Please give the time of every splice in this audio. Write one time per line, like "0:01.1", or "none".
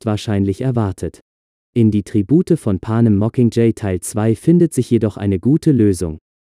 0:01.6